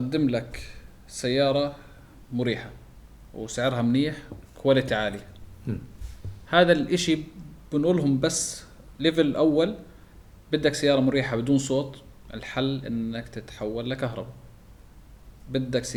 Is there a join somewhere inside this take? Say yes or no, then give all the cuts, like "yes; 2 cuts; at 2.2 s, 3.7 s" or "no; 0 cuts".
no; 0 cuts